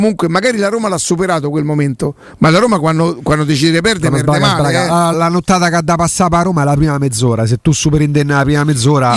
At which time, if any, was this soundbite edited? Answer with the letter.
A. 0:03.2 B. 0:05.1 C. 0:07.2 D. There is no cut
B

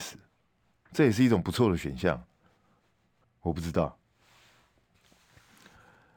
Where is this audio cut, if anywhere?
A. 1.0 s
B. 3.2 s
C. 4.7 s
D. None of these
B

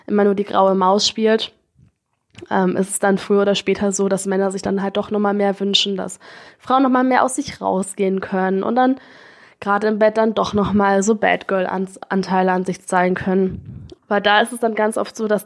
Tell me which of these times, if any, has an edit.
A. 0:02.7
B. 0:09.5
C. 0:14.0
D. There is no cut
C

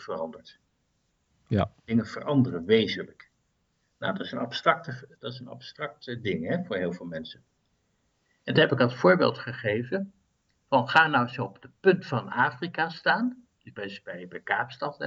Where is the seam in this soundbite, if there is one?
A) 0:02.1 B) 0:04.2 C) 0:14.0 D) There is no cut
D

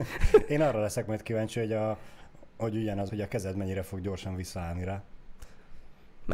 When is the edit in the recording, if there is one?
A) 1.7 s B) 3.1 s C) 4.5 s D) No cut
B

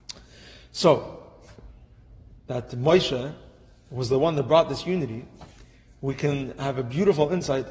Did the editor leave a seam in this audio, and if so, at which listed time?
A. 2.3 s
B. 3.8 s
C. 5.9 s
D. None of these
A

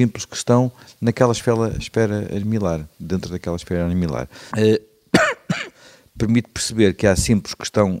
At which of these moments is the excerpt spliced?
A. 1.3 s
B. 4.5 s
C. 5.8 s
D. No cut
B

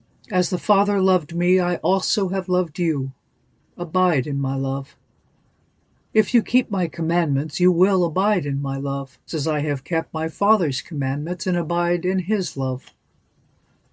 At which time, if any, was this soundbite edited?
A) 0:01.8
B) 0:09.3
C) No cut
B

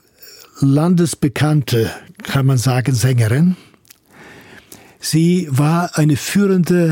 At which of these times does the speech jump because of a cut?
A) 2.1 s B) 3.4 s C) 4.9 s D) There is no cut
D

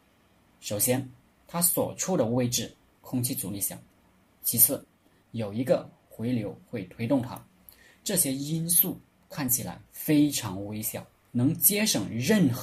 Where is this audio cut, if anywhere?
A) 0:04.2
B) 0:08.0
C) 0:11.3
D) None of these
C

